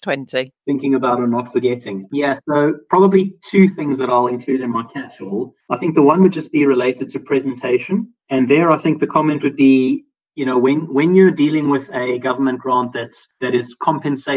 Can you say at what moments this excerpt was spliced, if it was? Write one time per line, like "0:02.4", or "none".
none